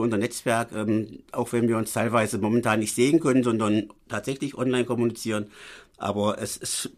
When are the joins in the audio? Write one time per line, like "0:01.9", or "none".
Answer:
none